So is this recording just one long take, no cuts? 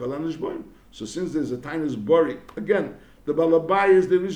yes; 0 cuts

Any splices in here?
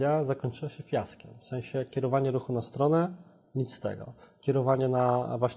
no; 0 cuts

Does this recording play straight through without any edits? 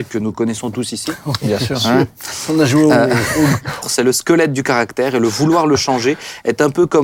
no; 1 cut; at 3.8 s

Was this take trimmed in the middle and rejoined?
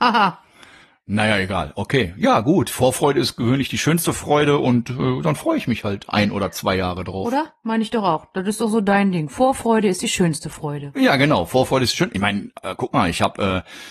no; 0 cuts

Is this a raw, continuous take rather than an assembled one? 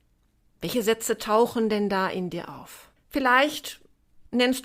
no; 1 cut; at 3.0 s

